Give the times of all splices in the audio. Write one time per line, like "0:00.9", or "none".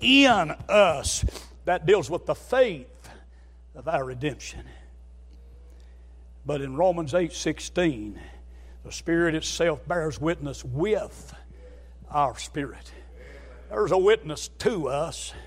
none